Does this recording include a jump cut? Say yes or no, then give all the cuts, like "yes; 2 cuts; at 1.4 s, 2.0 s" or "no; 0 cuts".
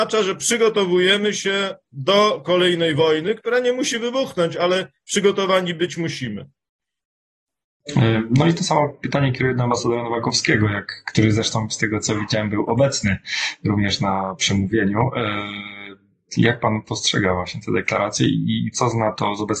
no; 0 cuts